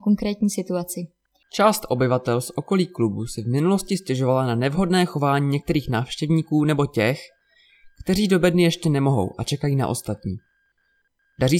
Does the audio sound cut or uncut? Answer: cut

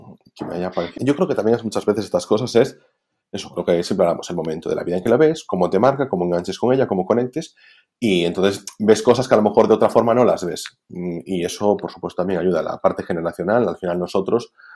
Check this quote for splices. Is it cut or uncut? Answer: cut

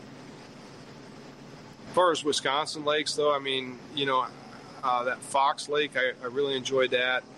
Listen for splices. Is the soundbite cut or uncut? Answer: cut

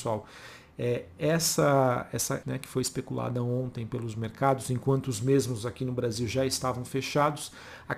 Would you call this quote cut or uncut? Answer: cut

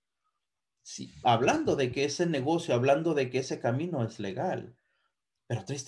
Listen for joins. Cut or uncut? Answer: cut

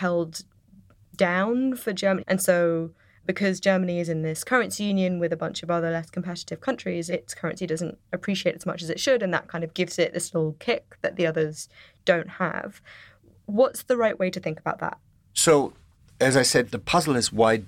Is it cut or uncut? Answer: cut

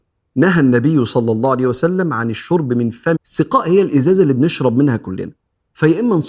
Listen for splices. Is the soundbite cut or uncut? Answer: cut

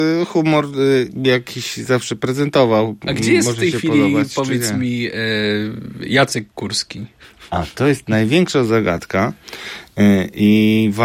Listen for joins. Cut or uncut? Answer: uncut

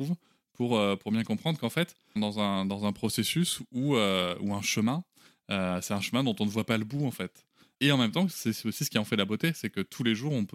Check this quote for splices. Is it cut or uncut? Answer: cut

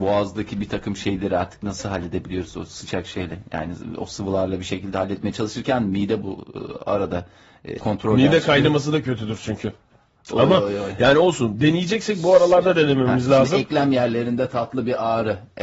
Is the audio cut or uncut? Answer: cut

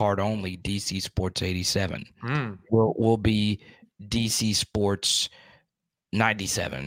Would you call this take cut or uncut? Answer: uncut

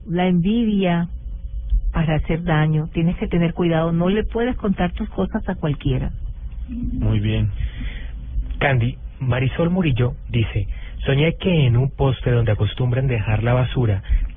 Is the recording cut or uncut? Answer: cut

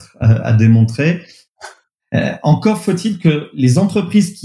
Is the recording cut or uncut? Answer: uncut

